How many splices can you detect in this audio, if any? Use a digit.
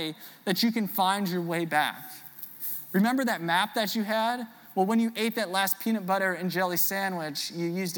0